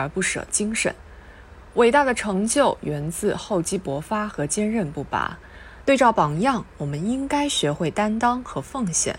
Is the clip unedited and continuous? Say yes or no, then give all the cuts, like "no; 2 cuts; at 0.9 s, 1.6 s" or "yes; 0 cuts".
no; 1 cut; at 5.8 s